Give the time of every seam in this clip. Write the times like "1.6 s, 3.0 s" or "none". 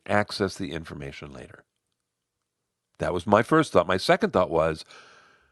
none